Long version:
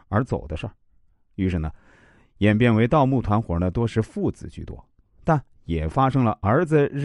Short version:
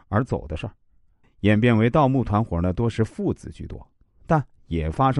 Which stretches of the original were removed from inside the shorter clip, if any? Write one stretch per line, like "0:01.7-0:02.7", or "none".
0:01.2-0:02.2